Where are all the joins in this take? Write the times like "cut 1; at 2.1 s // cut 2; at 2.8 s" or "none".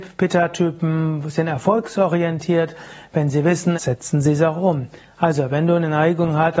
cut 1; at 3.7 s